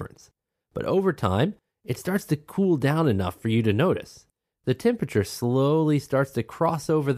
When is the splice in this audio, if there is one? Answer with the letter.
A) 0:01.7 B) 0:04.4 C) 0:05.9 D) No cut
A